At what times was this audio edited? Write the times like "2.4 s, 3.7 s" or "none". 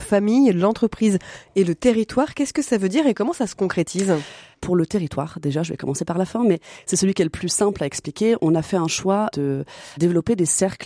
none

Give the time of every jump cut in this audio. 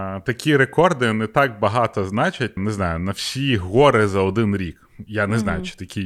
2.6 s

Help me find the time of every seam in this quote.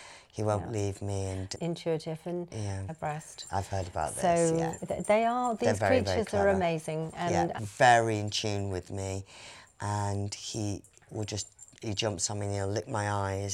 1.5 s, 2.9 s, 7.6 s

